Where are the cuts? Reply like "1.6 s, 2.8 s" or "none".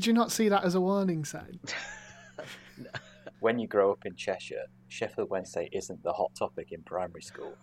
3.3 s